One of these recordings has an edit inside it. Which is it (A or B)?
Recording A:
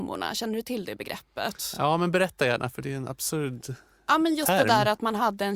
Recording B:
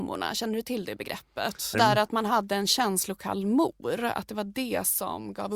B